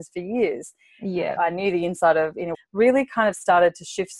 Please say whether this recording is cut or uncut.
cut